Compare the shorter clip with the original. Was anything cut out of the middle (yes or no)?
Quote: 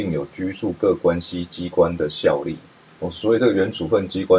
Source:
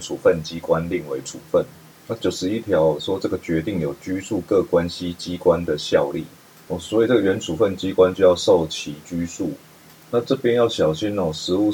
no